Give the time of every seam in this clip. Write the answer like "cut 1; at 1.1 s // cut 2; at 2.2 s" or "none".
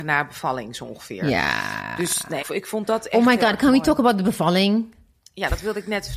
cut 1; at 2.4 s